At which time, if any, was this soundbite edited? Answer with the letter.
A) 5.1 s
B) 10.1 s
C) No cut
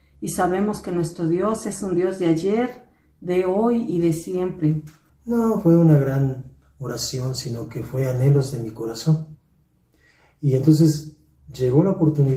A